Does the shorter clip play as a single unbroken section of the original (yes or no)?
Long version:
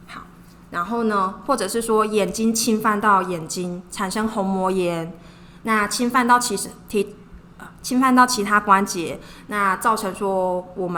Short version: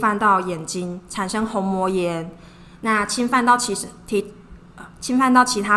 yes